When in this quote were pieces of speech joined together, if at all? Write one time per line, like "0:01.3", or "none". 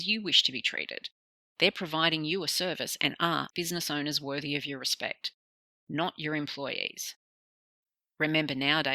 0:03.5